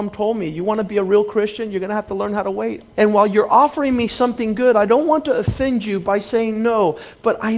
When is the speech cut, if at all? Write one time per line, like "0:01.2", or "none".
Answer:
0:02.9